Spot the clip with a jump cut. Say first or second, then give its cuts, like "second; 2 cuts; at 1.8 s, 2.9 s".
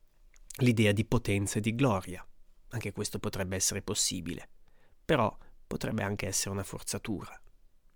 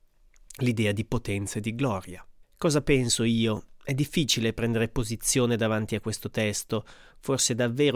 second; 1 cut; at 2.4 s